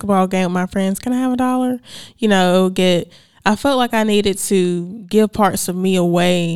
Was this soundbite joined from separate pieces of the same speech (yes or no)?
yes